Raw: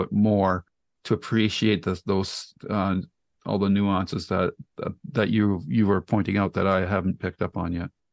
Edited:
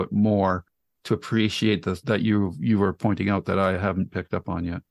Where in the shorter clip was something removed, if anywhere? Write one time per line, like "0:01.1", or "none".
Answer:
0:02.0